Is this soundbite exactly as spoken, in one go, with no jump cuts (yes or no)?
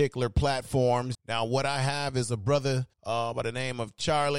no